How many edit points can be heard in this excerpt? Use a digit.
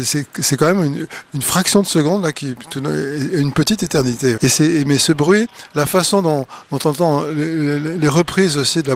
1